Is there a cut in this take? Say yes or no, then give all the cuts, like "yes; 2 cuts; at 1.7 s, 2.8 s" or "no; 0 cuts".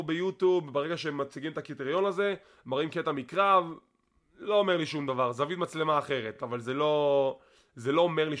no; 0 cuts